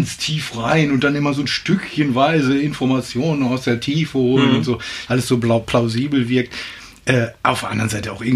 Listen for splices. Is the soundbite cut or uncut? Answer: cut